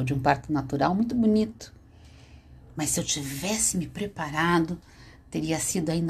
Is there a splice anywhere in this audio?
no; 0 cuts

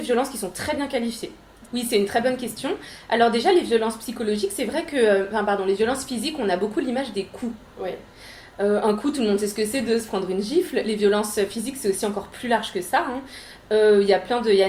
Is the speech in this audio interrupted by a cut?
yes; 1 cut; at 1.7 s

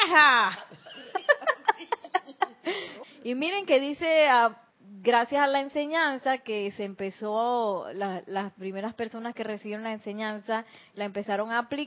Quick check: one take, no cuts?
no; 2 cuts; at 3.0 s, 4.7 s

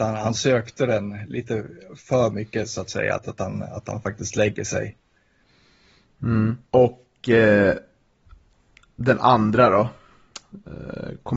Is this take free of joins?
no; 1 cut; at 6.6 s

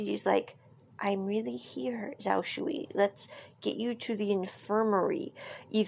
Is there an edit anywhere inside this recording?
no; 0 cuts

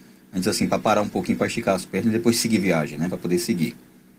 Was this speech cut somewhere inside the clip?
no; 0 cuts

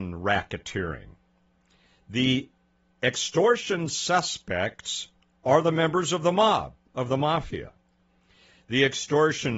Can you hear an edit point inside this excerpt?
no; 0 cuts

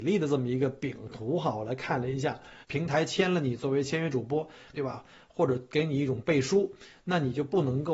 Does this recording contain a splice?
yes; 2 cuts; at 2.6 s, 4.7 s

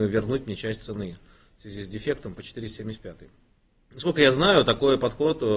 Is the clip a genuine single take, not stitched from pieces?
yes; 0 cuts

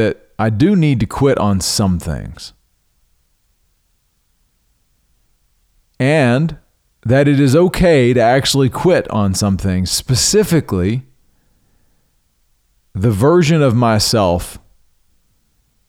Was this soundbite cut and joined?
no; 0 cuts

